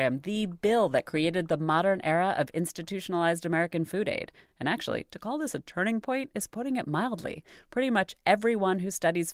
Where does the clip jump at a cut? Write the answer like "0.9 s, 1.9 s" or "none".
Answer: none